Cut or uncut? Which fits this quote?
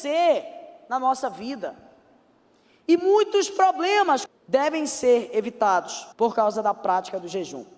cut